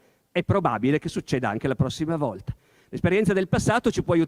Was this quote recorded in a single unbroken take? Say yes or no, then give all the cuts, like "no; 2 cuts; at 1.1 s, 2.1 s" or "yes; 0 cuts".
yes; 0 cuts